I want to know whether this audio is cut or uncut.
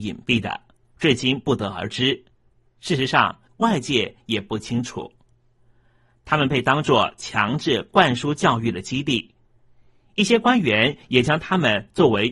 cut